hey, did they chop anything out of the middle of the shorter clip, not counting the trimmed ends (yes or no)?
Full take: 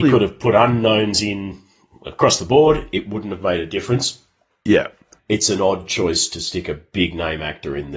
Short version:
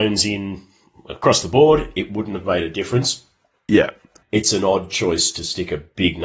no